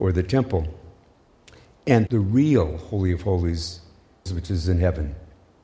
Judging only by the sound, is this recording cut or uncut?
cut